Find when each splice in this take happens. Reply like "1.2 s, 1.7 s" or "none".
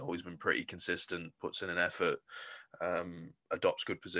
none